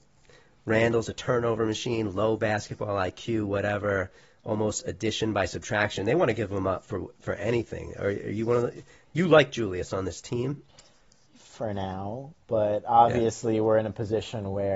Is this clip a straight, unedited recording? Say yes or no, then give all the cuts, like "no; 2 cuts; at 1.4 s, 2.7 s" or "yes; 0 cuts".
yes; 0 cuts